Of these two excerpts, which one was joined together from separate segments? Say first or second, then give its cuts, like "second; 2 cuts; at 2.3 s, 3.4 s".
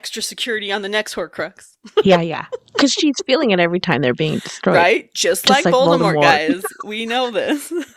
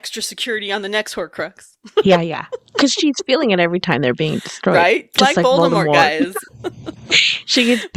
second; 2 cuts; at 5.1 s, 6.5 s